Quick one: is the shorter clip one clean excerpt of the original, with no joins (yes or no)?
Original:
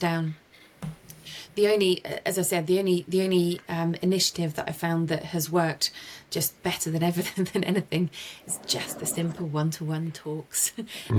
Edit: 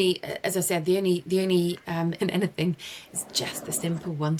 no